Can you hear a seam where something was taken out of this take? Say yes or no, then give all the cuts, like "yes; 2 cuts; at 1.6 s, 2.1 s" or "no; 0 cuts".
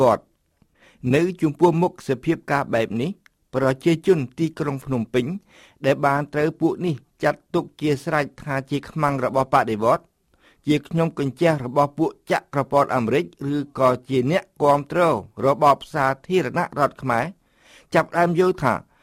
no; 0 cuts